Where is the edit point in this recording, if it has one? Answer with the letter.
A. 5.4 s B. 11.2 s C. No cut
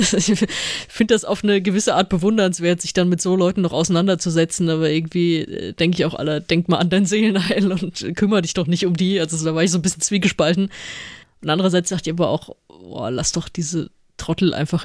B